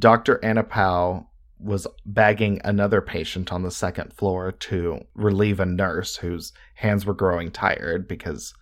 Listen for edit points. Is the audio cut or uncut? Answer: uncut